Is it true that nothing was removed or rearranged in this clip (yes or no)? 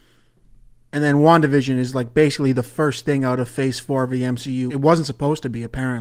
no